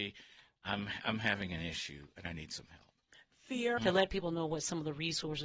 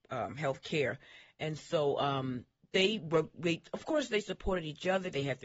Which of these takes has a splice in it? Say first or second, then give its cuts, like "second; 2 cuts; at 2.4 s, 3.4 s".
first; 1 cut; at 3.8 s